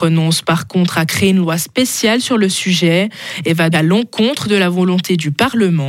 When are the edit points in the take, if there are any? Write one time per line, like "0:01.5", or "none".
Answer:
0:03.7